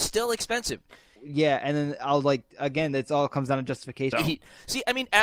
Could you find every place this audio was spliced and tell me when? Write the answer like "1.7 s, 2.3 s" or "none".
1.2 s, 4.1 s